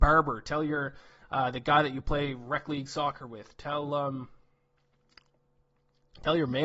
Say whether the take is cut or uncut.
uncut